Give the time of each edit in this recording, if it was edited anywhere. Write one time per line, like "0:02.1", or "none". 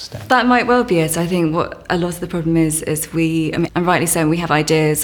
0:03.7